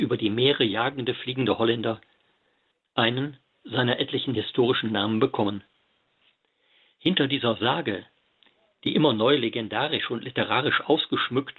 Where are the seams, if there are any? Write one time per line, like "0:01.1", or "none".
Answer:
none